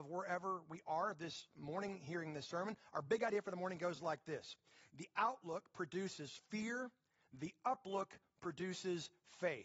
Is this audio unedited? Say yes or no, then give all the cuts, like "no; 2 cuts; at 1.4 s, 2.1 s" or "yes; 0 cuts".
yes; 0 cuts